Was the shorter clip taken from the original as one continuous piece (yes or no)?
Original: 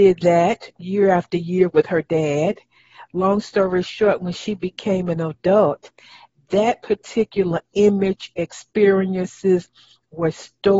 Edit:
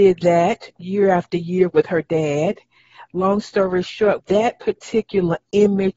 no